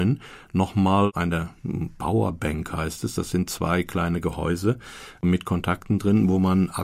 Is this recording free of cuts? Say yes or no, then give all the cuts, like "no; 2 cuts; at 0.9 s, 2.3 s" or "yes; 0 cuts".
yes; 0 cuts